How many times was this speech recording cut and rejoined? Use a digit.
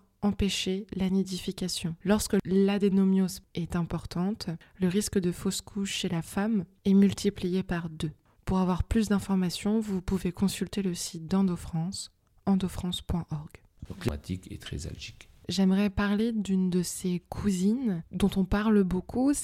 2